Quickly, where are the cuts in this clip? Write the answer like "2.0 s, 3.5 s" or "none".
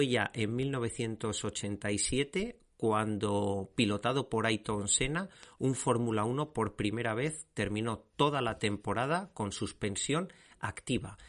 none